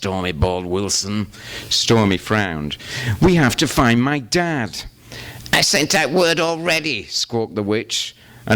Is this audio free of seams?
yes; 0 cuts

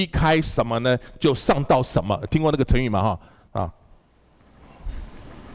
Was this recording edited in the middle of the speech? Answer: no; 0 cuts

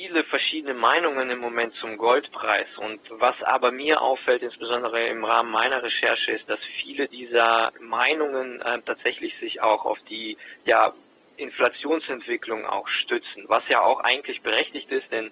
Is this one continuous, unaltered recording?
yes; 0 cuts

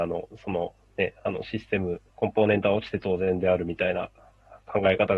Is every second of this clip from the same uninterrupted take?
no; 1 cut; at 2.1 s

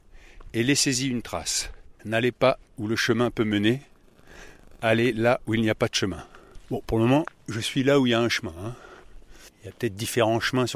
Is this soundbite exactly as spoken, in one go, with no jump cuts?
no; 1 cut; at 1.9 s

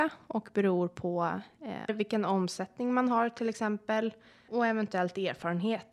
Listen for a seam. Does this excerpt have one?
yes; 2 cuts; at 1.9 s, 4.5 s

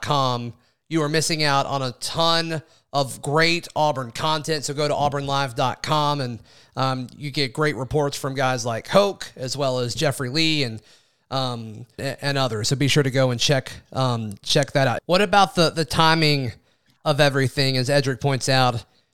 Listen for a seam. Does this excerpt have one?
yes; 2 cuts; at 12.0 s, 15.0 s

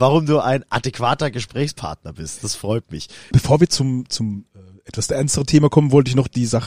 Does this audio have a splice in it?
yes; 1 cut; at 3.3 s

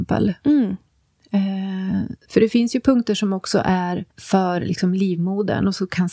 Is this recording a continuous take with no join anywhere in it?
no; 2 cuts; at 2.2 s, 4.1 s

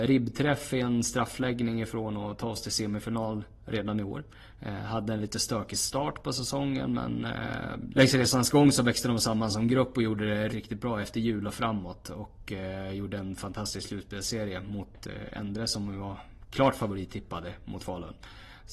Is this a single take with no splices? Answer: no; 2 cuts; at 7.9 s, 10.5 s

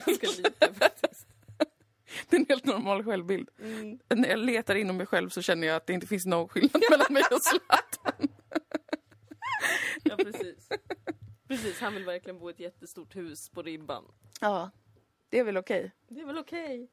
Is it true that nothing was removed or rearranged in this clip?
no; 1 cut; at 10.0 s

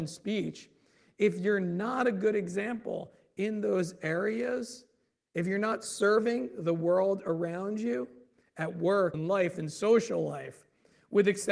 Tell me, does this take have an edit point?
yes; 1 cut; at 9.1 s

